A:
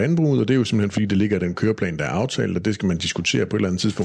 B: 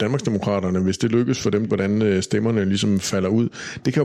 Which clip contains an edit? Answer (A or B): B